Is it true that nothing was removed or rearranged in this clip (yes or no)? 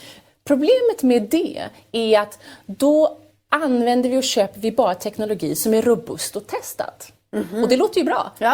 yes